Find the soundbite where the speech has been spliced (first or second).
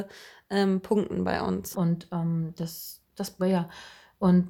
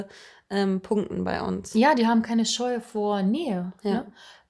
first